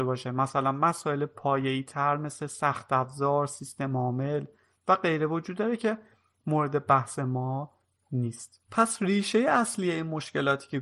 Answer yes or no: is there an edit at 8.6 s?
yes